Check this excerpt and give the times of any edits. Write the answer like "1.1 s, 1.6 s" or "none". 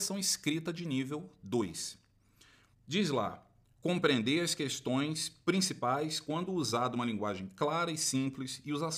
2.7 s